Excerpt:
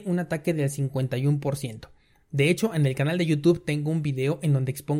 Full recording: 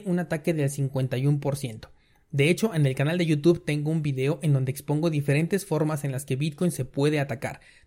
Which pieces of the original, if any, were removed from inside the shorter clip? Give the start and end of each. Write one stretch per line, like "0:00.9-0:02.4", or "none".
none